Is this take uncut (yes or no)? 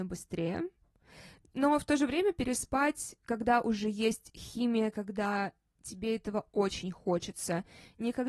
yes